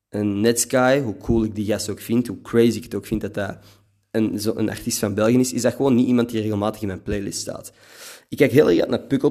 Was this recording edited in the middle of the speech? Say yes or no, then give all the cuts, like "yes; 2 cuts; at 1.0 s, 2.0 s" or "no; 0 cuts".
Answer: no; 0 cuts